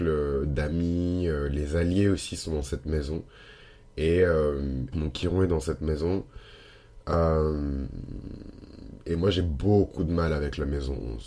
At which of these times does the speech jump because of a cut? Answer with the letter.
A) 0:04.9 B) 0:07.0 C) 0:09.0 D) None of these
A